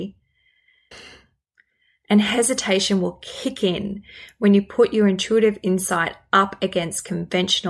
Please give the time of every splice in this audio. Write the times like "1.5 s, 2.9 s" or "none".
0.9 s